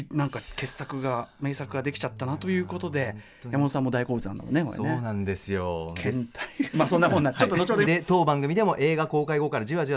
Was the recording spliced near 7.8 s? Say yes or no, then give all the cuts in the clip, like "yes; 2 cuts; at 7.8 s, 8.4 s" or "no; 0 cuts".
yes; 2 cuts; at 6.7 s, 7.8 s